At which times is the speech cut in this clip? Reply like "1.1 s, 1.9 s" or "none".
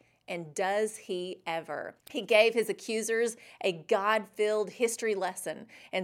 2.0 s